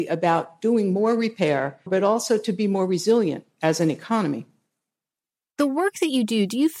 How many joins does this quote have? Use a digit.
1